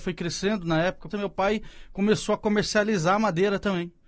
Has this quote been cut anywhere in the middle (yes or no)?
yes